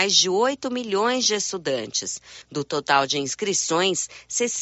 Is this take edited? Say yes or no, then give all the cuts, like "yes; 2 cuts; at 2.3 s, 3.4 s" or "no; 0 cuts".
yes; 1 cut; at 2.4 s